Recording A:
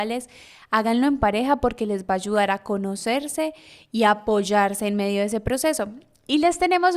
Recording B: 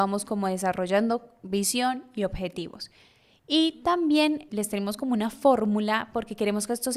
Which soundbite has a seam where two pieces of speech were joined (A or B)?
B